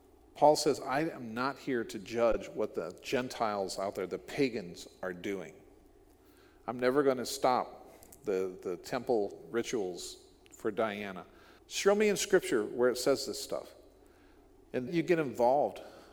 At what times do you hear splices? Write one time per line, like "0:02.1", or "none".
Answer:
0:11.6
0:14.9